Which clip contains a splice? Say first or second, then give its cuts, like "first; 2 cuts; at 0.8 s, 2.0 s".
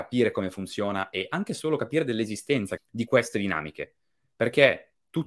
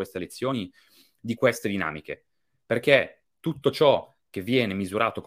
first; 1 cut; at 2.8 s